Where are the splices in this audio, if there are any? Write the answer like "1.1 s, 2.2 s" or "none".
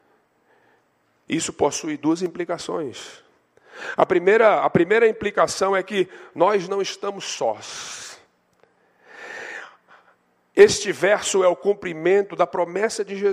1.3 s